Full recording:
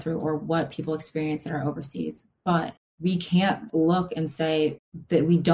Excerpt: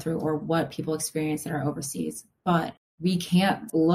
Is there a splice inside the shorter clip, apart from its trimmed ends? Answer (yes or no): no